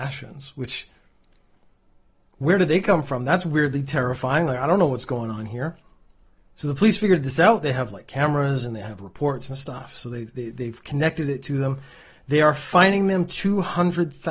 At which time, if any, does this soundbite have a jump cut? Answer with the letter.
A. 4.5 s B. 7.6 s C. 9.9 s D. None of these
D